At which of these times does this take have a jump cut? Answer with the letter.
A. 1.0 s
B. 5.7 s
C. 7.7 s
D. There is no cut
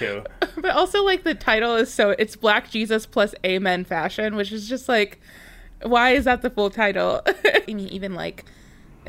C